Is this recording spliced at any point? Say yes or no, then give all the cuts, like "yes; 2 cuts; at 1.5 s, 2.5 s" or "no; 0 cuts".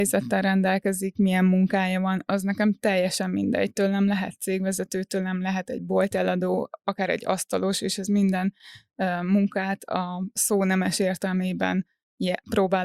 no; 0 cuts